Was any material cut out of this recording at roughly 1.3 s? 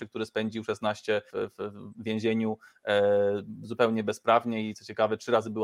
yes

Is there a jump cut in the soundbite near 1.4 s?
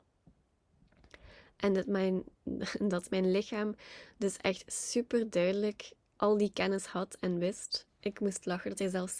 no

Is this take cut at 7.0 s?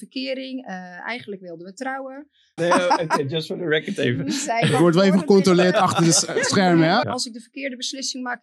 yes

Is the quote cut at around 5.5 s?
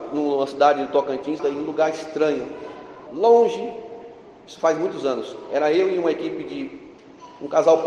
no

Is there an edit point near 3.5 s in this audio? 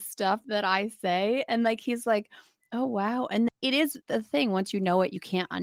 yes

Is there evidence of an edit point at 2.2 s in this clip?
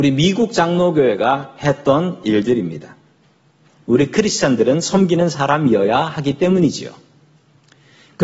no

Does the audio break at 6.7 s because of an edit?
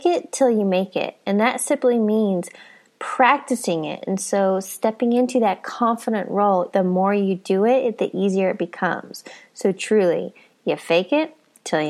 yes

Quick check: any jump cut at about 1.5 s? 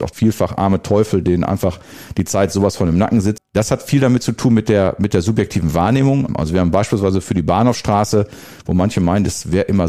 no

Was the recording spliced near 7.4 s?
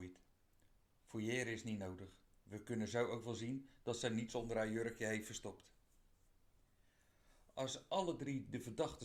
no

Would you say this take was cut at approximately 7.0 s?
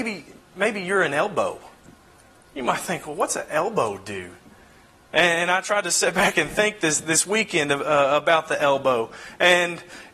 no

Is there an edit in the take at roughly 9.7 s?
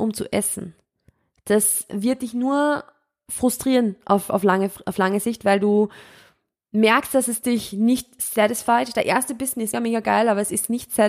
yes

